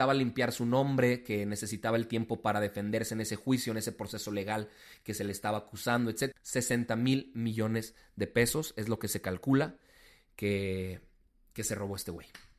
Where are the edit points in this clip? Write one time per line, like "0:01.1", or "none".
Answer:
0:06.3